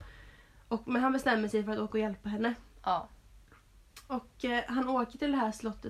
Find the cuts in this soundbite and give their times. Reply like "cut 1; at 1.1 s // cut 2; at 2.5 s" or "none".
none